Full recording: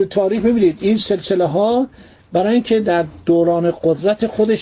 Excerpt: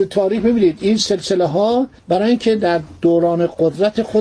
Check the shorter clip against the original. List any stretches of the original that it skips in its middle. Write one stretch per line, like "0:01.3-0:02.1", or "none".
0:02.0-0:02.2